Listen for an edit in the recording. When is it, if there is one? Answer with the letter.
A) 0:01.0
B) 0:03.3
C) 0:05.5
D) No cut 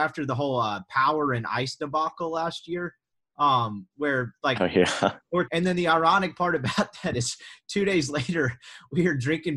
C